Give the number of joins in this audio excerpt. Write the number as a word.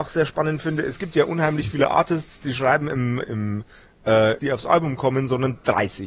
two